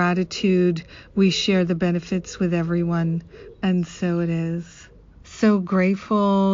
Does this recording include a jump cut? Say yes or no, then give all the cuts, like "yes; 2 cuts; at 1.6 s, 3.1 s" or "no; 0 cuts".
yes; 2 cuts; at 3.5 s, 5.2 s